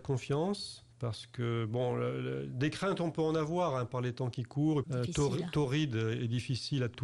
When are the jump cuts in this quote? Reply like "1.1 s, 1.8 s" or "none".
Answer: 0.9 s, 4.8 s